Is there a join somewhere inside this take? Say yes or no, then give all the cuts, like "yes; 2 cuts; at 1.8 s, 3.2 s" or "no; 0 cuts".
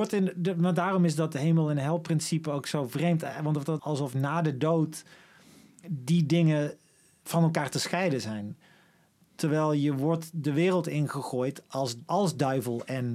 yes; 2 cuts; at 3.8 s, 12.1 s